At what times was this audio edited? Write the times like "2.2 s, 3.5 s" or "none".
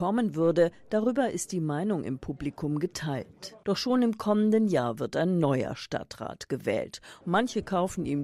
3.6 s, 7.2 s